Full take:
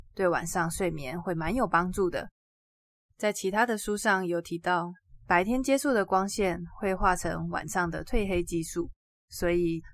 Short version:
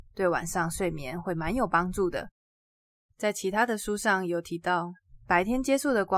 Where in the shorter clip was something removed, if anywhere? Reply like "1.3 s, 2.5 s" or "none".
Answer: none